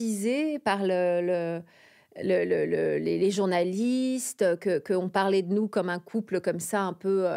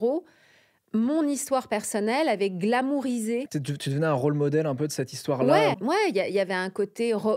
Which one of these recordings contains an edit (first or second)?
second